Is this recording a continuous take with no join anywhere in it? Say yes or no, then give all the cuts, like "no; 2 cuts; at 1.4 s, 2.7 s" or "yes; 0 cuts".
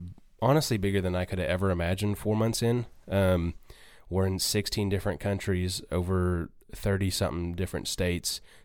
yes; 0 cuts